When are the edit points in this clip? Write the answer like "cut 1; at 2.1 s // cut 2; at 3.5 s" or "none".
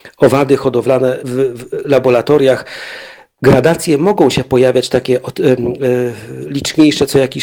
cut 1; at 1.2 s